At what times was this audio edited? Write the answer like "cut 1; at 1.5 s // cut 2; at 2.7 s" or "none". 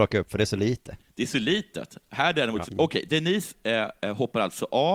cut 1; at 2.7 s